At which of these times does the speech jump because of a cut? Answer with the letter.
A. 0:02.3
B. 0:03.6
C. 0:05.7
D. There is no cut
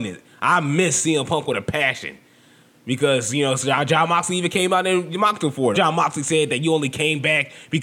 C